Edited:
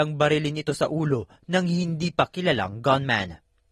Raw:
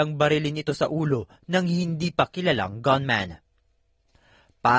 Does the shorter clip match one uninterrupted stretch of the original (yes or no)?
yes